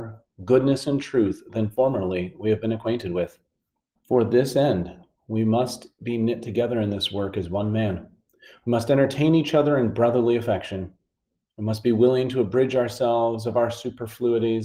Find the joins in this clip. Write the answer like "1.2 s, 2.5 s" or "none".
4.0 s